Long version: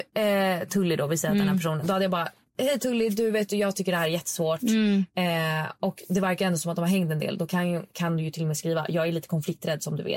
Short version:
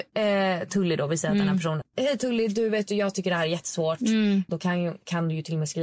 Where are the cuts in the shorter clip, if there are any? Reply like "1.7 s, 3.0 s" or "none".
1.8 s, 4.5 s

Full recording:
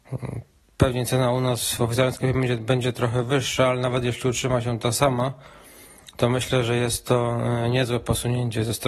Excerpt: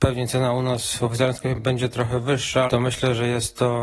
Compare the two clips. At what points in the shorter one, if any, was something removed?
1.5 s, 2.7 s

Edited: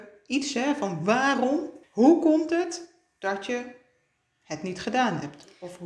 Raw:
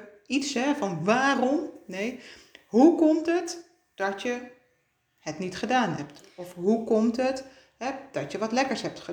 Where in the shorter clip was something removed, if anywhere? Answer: 1.8 s

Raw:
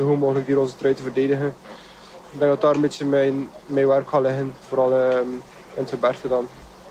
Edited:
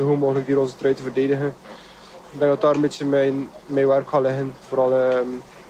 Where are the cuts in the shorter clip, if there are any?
none

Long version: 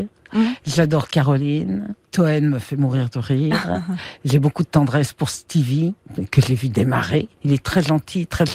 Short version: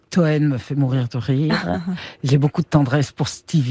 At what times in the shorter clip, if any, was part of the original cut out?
none

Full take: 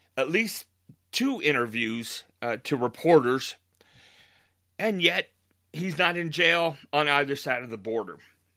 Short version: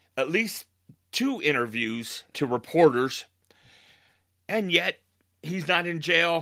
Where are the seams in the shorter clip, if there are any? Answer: 2.3 s

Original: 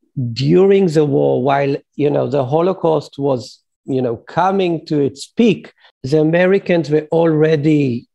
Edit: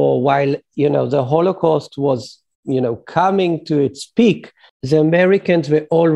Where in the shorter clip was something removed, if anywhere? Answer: none

